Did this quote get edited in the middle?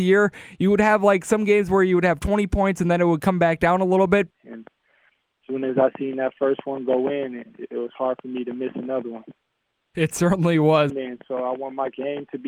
yes; 2 cuts; at 4.3 s, 10.9 s

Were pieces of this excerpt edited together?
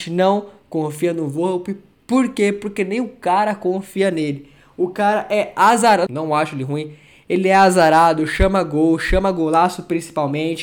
yes; 1 cut; at 6.1 s

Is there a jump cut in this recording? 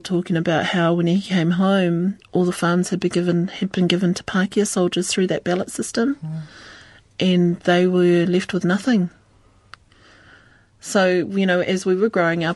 no; 0 cuts

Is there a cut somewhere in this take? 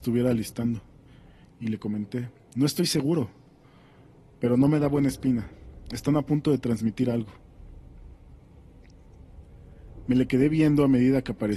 yes; 1 cut; at 1.5 s

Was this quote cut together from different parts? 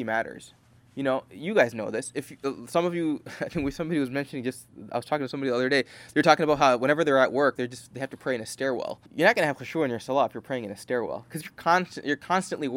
yes; 2 cuts; at 7.6 s, 9.1 s

